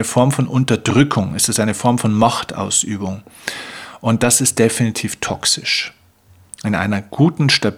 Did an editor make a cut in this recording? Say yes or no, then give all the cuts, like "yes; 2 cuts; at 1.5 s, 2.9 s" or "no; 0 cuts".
no; 0 cuts